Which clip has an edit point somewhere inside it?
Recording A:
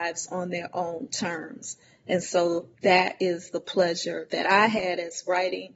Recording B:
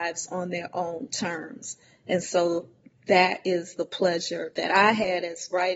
A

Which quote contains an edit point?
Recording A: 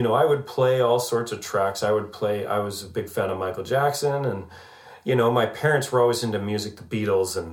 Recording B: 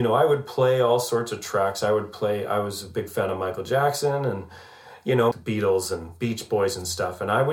B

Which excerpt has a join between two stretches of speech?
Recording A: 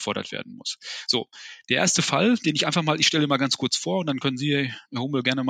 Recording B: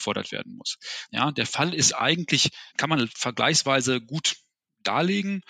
B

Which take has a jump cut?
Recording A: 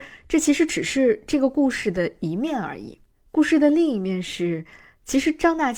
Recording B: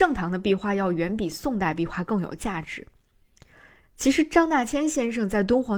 B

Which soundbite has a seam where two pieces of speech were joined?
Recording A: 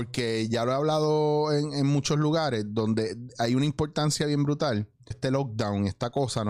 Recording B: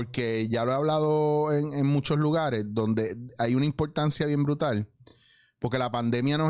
A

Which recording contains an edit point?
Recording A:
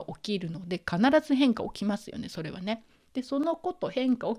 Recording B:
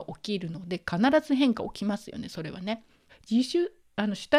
B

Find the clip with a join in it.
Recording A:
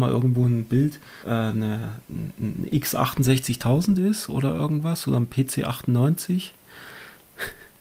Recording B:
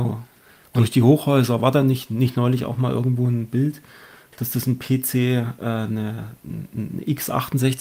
A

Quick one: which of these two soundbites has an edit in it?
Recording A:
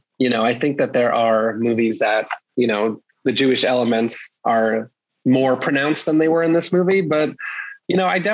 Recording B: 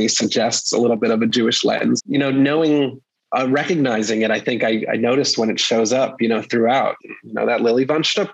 B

